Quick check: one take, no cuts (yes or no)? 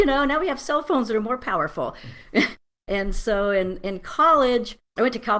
yes